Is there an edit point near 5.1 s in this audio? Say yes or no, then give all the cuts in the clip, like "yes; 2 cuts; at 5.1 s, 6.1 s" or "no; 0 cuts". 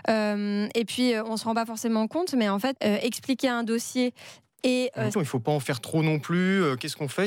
yes; 2 cuts; at 2.8 s, 5.1 s